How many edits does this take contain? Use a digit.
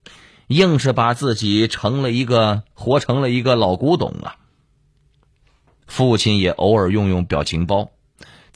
1